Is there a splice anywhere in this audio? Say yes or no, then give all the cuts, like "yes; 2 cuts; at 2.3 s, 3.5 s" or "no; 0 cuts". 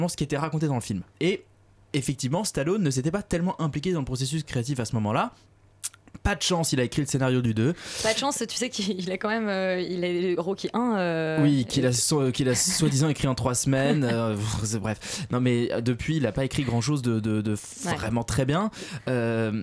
no; 0 cuts